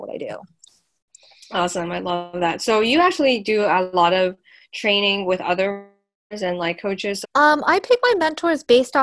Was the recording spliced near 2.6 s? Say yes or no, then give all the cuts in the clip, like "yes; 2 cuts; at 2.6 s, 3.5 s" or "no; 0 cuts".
no; 1 cut; at 7.2 s